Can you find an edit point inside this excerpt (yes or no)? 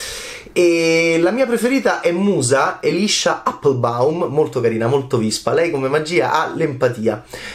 no